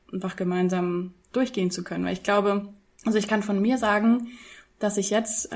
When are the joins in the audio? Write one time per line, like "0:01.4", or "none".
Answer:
0:01.2